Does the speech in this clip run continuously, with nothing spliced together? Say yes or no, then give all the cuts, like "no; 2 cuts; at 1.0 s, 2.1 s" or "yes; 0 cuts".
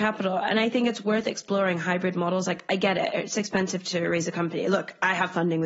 yes; 0 cuts